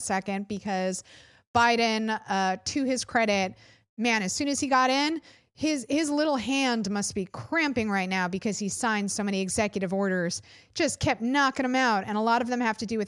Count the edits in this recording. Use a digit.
0